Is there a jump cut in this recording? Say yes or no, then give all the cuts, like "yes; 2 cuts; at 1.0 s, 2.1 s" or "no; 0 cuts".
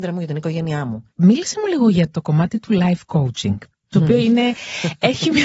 no; 0 cuts